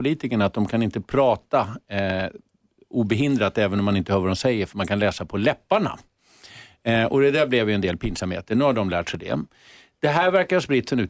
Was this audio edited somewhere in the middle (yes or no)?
no